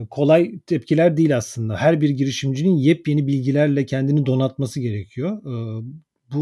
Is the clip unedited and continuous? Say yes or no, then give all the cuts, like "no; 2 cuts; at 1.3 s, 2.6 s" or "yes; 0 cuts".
yes; 0 cuts